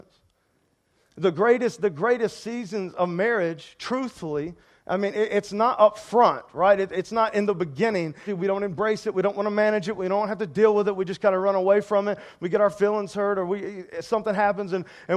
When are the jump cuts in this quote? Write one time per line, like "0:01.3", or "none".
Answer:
0:08.3